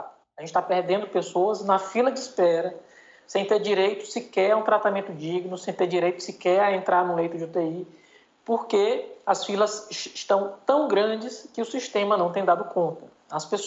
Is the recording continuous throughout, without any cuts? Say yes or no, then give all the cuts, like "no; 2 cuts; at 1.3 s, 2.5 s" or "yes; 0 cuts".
yes; 0 cuts